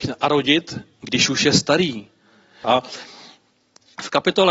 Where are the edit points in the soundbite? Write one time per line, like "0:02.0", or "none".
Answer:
0:02.6